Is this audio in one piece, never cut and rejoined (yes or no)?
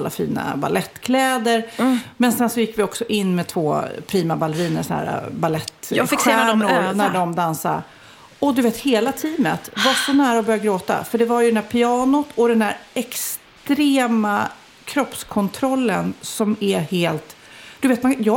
yes